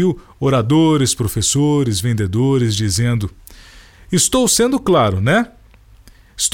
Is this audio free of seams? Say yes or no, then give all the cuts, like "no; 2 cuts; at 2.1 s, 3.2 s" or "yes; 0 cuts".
yes; 0 cuts